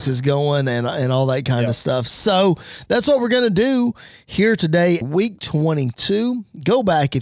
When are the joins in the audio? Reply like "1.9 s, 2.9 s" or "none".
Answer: 5.0 s